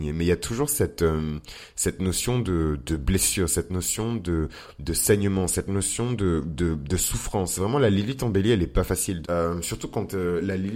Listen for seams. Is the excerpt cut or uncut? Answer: cut